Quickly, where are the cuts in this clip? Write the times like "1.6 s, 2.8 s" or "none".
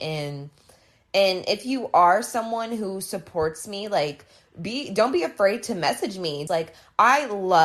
6.5 s